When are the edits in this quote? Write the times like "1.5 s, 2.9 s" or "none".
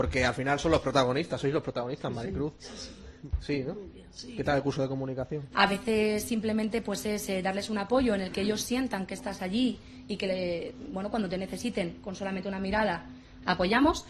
5.5 s